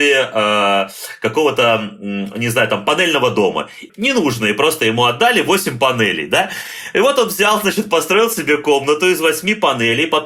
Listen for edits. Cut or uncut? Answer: cut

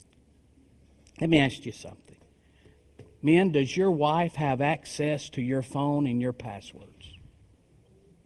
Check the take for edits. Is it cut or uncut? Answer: uncut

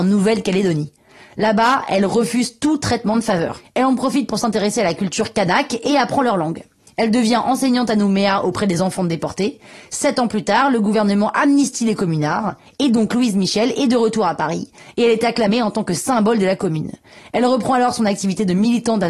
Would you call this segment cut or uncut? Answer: uncut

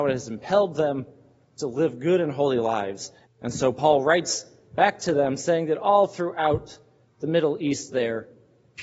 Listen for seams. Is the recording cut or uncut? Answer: cut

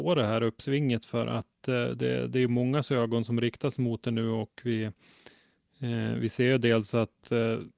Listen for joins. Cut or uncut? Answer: uncut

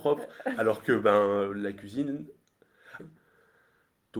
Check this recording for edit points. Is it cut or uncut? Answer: cut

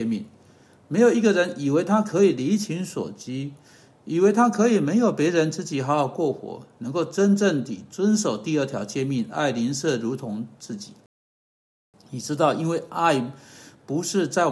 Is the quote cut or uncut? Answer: uncut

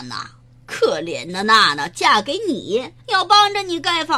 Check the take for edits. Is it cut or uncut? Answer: cut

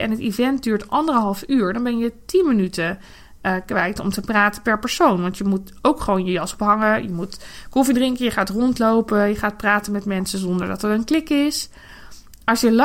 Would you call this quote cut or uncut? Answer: uncut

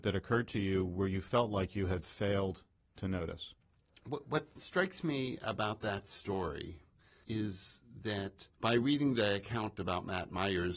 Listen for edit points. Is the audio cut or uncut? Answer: cut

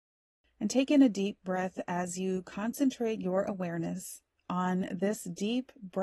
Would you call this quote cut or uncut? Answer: uncut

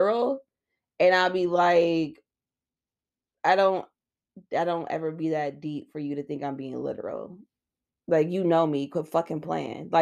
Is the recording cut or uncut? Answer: uncut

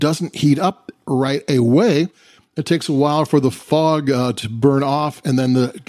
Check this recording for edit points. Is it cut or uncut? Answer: uncut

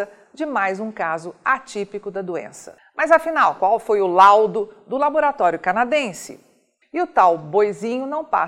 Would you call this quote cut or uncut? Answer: cut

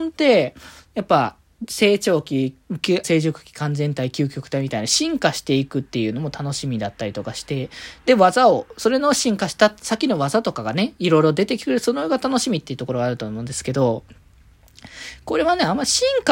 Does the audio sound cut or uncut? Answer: cut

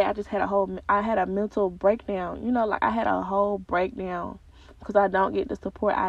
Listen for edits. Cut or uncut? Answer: uncut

